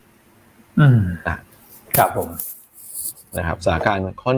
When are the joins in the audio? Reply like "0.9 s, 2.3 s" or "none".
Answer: 1.8 s